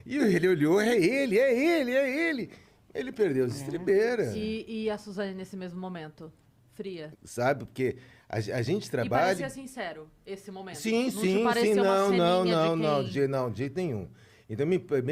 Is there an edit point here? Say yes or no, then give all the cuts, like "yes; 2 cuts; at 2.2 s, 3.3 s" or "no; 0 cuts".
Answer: yes; 1 cut; at 7.1 s